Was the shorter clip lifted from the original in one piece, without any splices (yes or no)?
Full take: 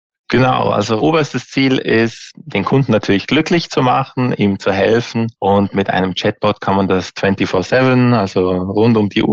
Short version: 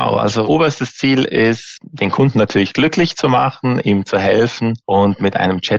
yes